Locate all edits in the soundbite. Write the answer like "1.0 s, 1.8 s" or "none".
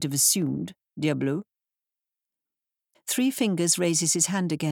2.9 s